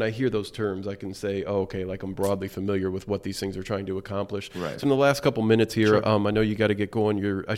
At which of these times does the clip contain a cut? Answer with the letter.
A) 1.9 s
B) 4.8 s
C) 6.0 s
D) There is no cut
B